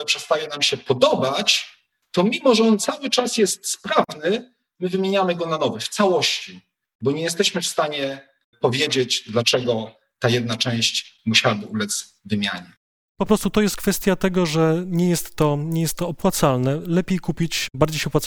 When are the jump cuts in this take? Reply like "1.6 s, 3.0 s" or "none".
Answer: none